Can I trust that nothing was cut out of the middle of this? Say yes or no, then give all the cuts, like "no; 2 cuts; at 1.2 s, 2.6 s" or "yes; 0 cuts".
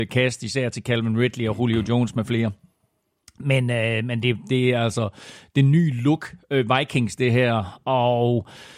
yes; 0 cuts